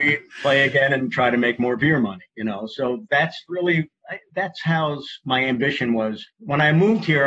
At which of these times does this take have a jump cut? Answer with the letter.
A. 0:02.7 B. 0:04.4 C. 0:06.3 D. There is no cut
C